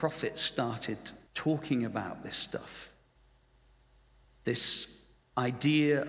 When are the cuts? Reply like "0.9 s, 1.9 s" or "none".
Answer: 1.3 s, 4.2 s